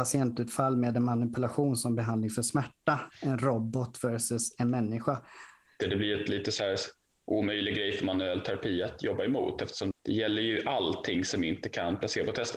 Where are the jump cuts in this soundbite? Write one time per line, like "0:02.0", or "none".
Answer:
0:05.8
0:09.9